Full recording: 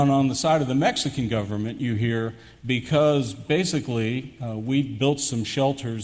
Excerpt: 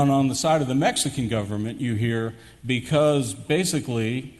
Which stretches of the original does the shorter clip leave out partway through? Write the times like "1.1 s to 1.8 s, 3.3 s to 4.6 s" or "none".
none